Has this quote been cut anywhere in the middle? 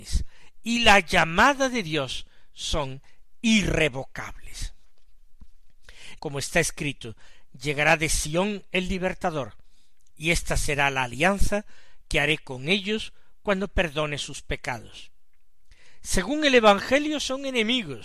yes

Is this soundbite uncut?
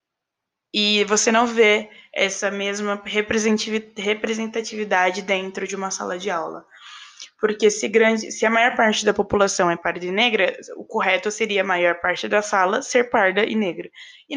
yes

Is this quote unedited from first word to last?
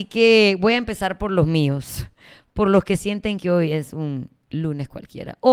yes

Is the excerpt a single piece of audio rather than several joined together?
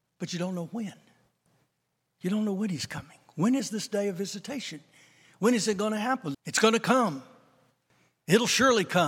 no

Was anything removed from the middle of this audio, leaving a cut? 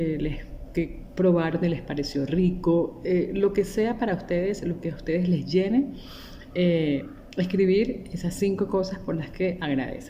no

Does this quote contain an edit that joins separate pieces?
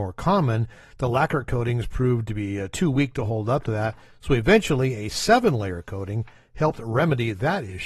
no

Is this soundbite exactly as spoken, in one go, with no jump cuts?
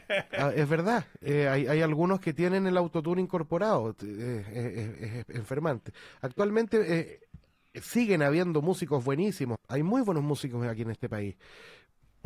no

